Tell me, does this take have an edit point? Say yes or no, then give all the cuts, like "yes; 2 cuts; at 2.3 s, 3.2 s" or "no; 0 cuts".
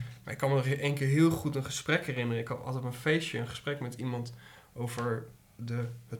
no; 0 cuts